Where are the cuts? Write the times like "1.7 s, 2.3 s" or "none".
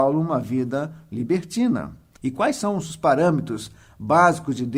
2.2 s